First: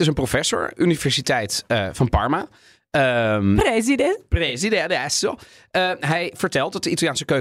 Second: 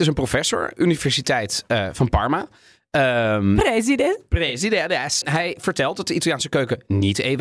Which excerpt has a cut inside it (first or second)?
second